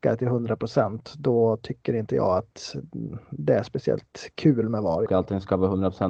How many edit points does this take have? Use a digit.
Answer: 1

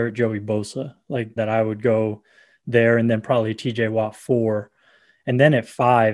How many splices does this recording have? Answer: 1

